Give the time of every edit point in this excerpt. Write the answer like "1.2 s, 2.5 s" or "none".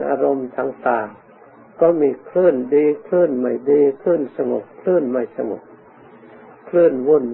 1.2 s

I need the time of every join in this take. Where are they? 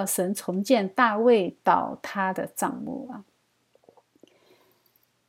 none

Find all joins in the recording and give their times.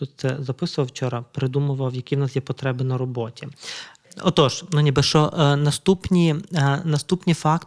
none

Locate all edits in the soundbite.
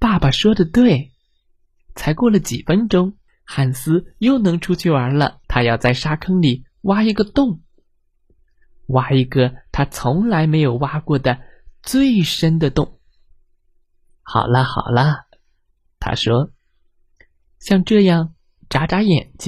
3.3 s, 5.4 s, 14.1 s

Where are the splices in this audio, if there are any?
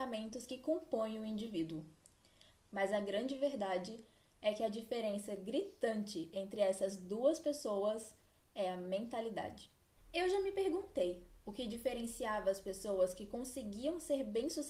2.5 s, 10.0 s

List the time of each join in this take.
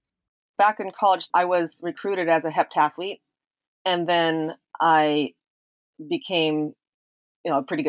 none

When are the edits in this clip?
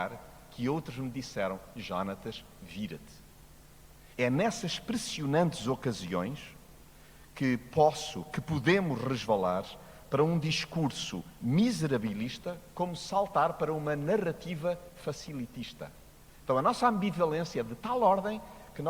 4.1 s

